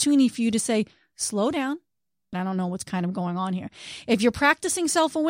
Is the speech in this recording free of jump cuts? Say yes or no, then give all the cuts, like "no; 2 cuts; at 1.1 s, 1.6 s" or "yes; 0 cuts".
no; 1 cut; at 2.3 s